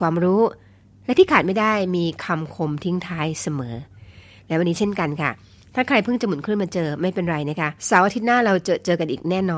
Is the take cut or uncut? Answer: cut